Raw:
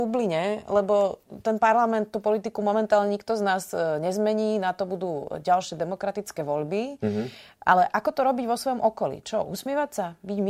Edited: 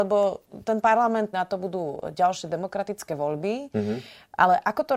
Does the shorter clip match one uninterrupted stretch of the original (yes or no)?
no